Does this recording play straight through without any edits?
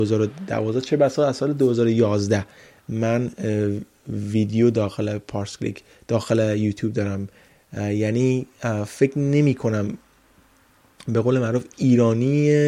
yes; 0 cuts

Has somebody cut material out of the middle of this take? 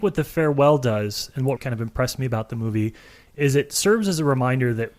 yes; 1 cut; at 1.6 s

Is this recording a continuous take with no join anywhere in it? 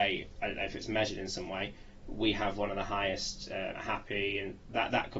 no; 1 cut; at 3.7 s

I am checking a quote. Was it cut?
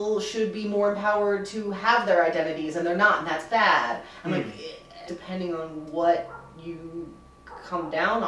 yes; 1 cut; at 5.1 s

